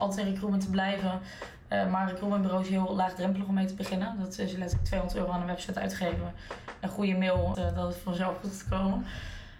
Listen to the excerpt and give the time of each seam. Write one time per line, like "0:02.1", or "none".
0:07.5

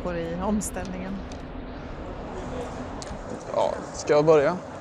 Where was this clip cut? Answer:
none

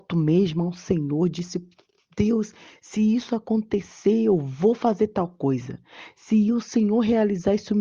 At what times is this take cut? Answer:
none

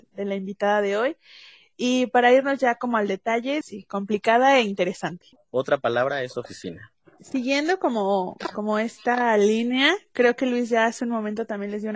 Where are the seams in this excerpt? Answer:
0:03.6
0:05.4

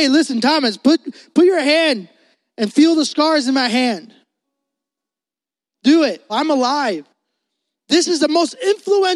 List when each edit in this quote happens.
0:06.3

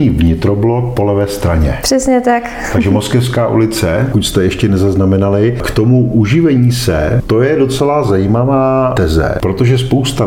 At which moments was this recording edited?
0:04.1

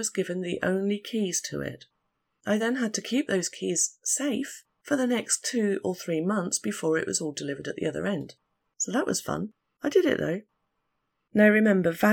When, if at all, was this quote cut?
none

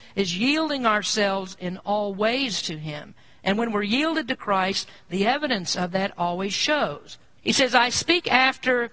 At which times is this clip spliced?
0:07.4

